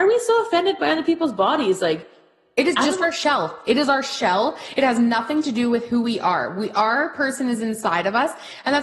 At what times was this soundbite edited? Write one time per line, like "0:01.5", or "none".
none